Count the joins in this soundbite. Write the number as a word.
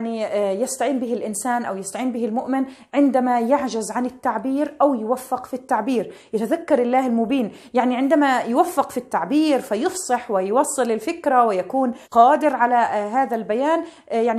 one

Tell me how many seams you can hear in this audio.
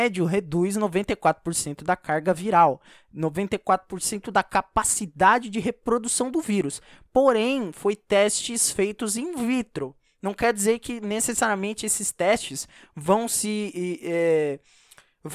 zero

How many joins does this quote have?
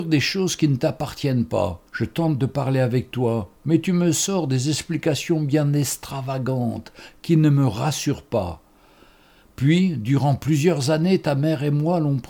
one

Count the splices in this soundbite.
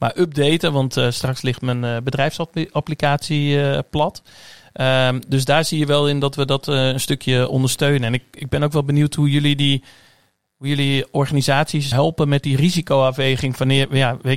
one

